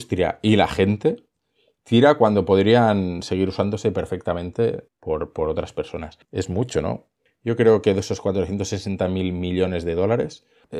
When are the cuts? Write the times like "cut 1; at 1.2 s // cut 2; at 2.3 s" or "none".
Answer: cut 1; at 4.9 s // cut 2; at 6.2 s

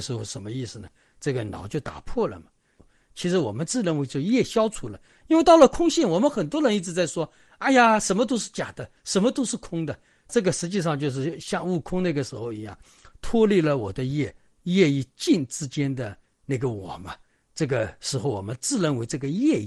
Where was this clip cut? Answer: none

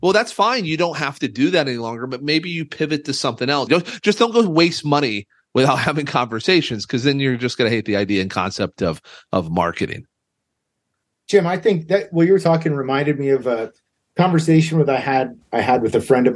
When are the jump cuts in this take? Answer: cut 1; at 3.7 s

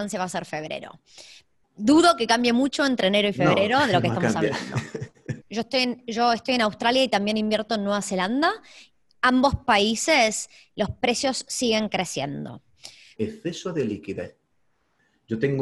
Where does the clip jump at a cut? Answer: cut 1; at 5.4 s // cut 2; at 13.2 s

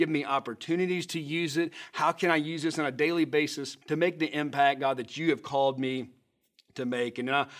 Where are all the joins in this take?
cut 1; at 3.8 s

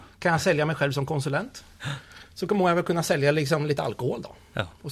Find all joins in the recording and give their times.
none

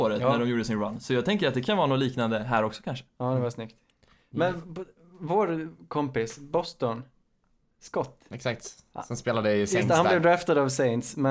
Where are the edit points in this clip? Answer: cut 1; at 8.3 s

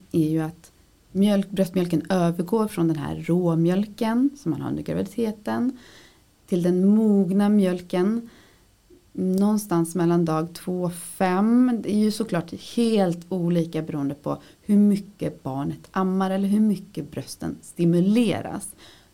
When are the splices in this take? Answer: none

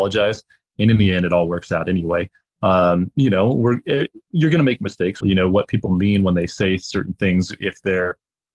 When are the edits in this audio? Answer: cut 1; at 5.2 s

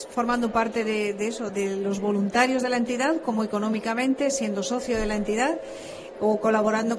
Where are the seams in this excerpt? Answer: cut 1; at 1.5 s

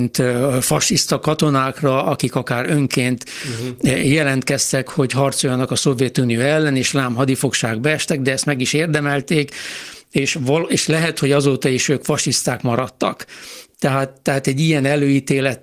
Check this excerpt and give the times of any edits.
none

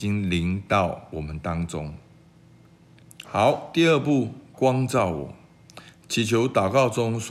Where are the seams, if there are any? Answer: cut 1; at 3.2 s // cut 2; at 4.5 s

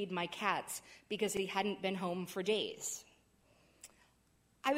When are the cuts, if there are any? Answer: none

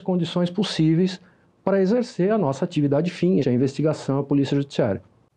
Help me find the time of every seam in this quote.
cut 1; at 3.4 s

